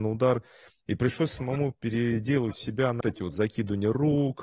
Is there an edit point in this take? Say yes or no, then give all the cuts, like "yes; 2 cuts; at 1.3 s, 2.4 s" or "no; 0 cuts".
yes; 1 cut; at 3.0 s